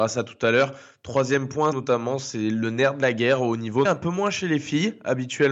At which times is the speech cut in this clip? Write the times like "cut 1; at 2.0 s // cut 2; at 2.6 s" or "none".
cut 1; at 1.7 s // cut 2; at 3.8 s

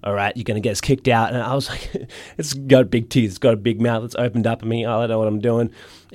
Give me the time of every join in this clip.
none

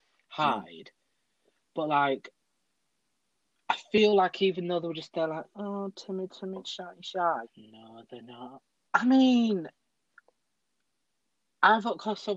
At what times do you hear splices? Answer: cut 1; at 7.4 s // cut 2; at 8.9 s

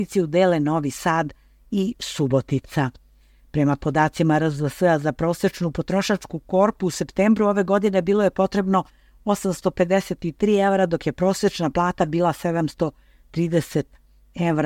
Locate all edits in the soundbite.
none

